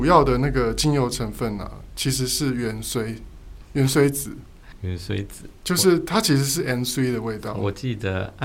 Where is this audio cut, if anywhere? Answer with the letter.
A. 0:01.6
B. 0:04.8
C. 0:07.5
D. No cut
D